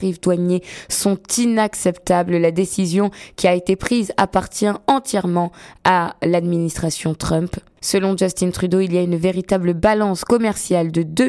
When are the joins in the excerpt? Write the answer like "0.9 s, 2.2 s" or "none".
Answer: none